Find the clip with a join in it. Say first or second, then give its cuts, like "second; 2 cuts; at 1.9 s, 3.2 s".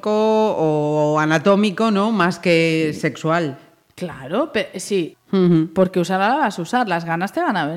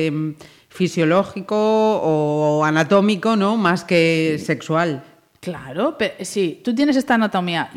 first; 1 cut; at 5.1 s